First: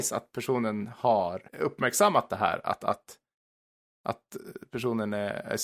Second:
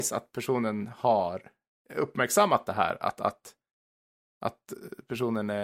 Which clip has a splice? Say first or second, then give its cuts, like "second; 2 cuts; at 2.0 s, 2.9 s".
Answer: first; 1 cut; at 1.5 s